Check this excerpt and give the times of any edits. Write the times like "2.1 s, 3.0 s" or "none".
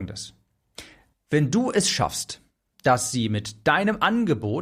1.1 s, 2.8 s